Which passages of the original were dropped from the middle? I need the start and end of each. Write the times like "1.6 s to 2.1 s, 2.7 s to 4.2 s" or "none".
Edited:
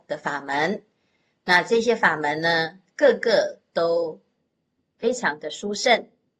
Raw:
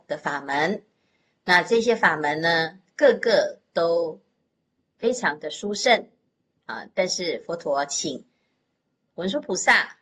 none